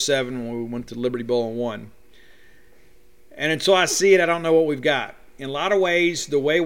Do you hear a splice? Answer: no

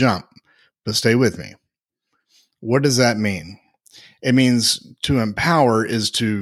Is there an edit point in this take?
no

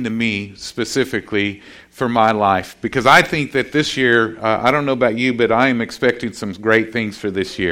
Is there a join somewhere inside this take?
no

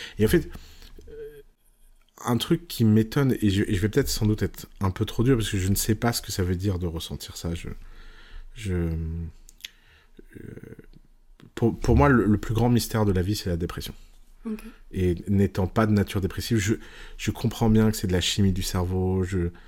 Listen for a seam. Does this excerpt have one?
no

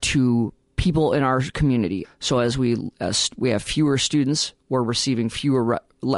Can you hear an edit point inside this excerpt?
yes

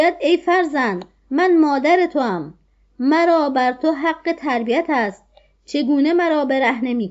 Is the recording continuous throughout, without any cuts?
yes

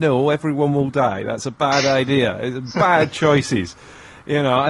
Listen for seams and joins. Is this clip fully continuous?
yes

